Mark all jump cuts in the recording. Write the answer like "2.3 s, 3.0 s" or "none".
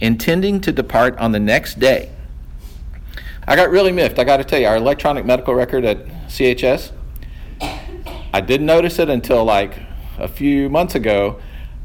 3.4 s